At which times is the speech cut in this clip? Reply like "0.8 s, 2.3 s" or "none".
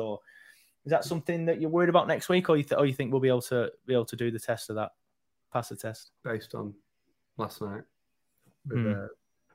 6.2 s